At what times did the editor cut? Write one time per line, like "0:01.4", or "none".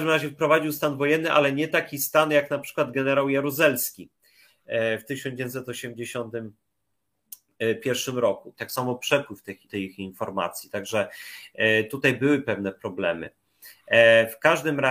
0:08.5
0:09.7